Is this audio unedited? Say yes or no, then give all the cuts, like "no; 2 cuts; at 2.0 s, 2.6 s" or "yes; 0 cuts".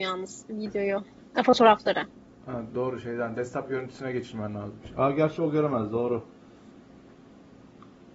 no; 1 cut; at 2.7 s